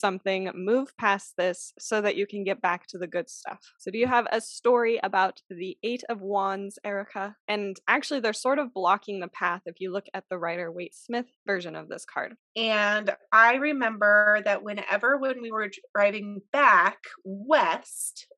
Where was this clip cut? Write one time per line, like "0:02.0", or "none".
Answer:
0:07.4
0:12.4

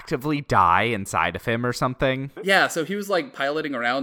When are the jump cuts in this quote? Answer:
0:02.4

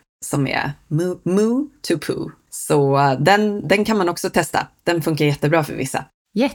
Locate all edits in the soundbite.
none

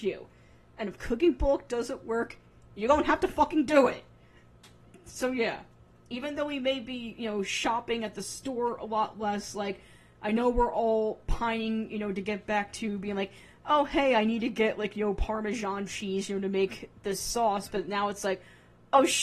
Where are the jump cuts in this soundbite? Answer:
none

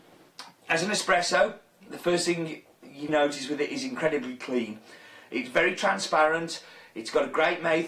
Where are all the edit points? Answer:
0:03.1

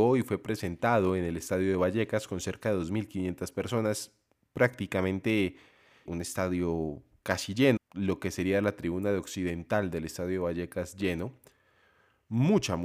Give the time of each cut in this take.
0:06.1
0:07.8

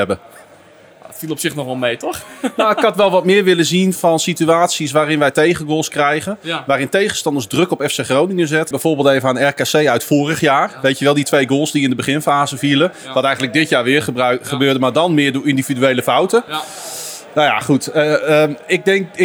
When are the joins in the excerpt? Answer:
0:04.0
0:08.7

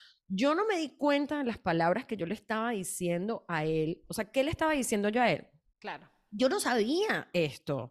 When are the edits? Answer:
0:05.7

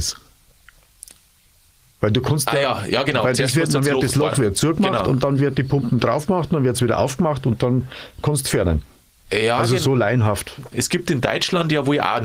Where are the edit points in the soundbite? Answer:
0:10.7

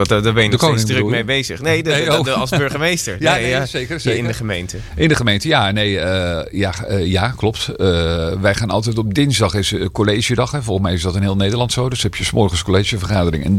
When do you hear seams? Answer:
none

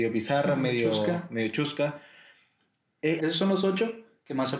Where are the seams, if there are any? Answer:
0:03.2

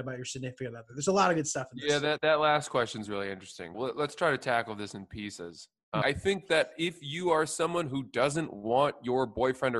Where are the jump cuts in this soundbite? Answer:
0:03.7
0:06.0

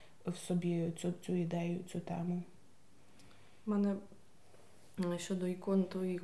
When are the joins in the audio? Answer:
none

